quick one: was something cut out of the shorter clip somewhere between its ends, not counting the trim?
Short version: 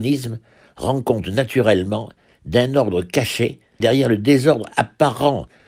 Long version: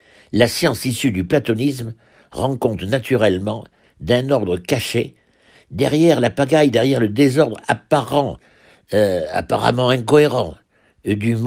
yes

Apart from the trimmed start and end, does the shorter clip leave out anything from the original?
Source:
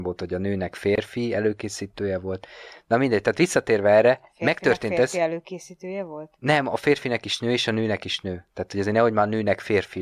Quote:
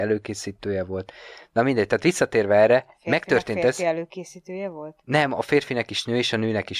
no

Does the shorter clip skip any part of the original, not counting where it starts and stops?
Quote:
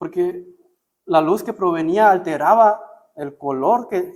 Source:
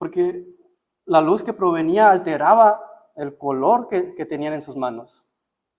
no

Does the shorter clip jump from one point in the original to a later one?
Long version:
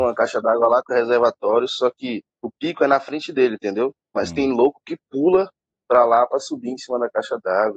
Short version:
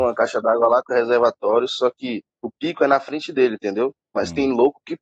no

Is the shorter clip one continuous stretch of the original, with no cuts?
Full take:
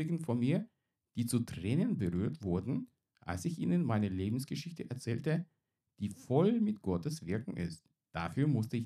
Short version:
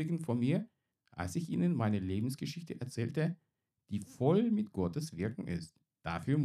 no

